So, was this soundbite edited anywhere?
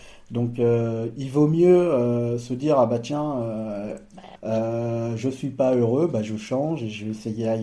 yes; 1 cut; at 4.4 s

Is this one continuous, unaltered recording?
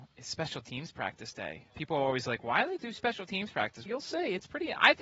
no; 2 cuts; at 1.7 s, 3.9 s

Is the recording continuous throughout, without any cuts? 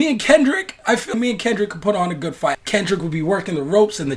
no; 2 cuts; at 1.1 s, 2.5 s

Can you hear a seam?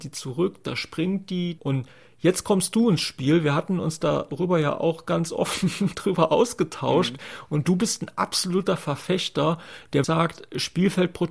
yes; 2 cuts; at 1.6 s, 10.0 s

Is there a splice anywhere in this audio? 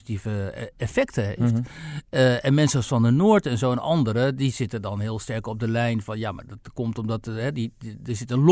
no; 0 cuts

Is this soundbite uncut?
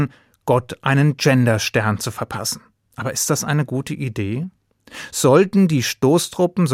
no; 1 cut; at 2.8 s

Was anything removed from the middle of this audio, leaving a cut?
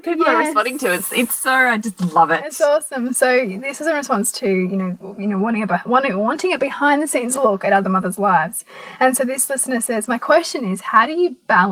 no; 0 cuts

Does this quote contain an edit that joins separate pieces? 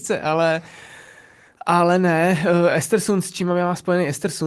no; 0 cuts

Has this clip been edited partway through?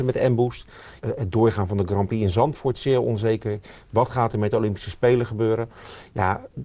yes; 1 cut; at 1.0 s

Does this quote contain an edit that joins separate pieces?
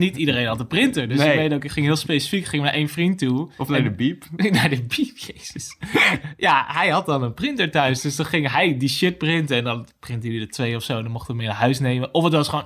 no; 0 cuts

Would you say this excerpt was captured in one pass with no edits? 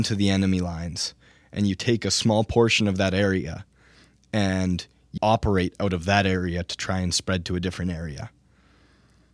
no; 1 cut; at 5.2 s

